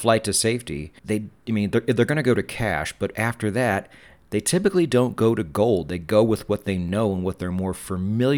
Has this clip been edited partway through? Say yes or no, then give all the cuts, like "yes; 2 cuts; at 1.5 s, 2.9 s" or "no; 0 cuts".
yes; 1 cut; at 1.0 s